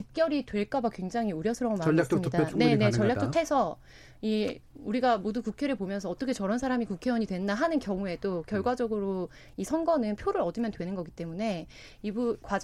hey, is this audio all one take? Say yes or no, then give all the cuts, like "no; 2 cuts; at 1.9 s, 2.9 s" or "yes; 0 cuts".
no; 1 cut; at 3.3 s